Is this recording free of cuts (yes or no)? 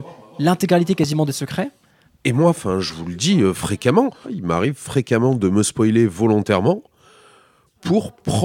no